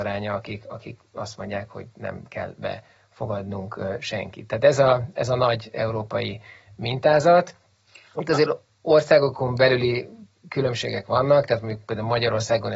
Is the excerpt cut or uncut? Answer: uncut